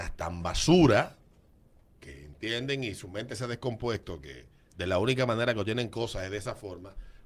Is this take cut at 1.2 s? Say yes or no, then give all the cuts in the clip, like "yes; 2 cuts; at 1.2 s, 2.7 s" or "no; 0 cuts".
no; 0 cuts